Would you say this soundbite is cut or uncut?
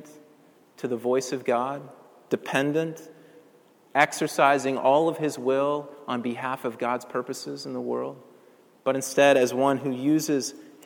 uncut